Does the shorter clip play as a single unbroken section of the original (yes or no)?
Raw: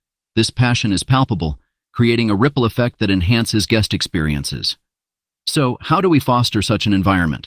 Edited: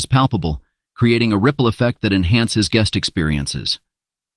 yes